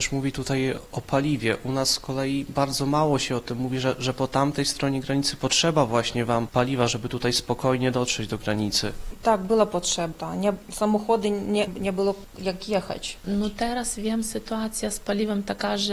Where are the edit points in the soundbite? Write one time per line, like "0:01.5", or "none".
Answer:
0:10.1
0:11.7